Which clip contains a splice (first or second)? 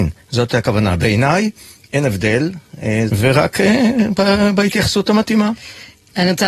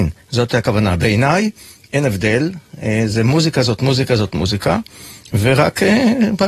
first